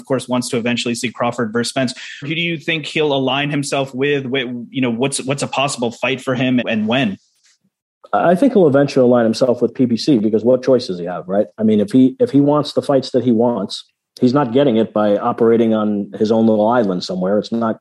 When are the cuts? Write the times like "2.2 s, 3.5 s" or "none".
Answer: 2.2 s, 6.6 s

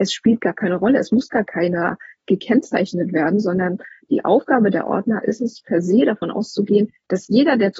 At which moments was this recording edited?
none

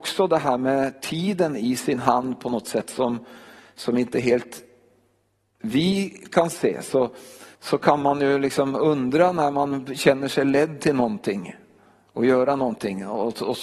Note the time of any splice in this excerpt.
7.6 s

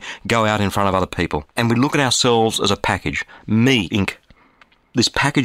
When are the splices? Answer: 1.5 s, 3.9 s

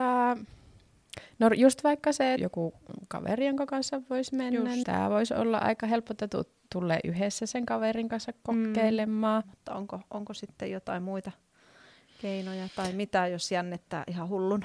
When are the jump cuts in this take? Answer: 2.4 s, 4.8 s, 9.4 s

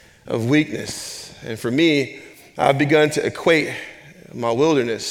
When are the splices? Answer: none

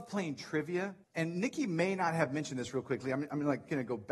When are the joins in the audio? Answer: 1.0 s

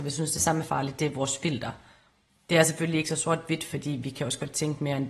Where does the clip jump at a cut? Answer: none

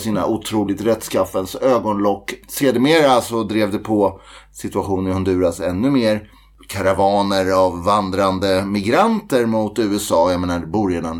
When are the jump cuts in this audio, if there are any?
none

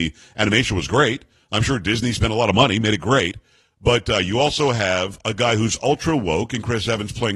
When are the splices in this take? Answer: none

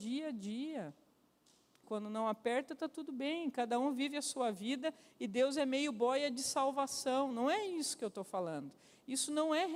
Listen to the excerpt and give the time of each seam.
1.8 s

